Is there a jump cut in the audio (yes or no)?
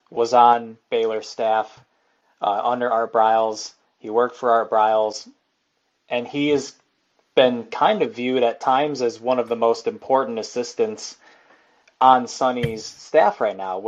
no